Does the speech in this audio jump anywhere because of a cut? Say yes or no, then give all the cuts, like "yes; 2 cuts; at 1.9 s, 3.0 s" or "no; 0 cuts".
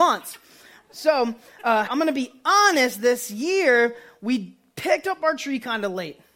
yes; 1 cut; at 1.9 s